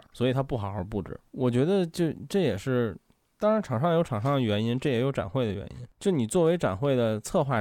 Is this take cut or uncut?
uncut